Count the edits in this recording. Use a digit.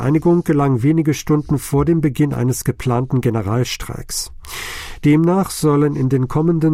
0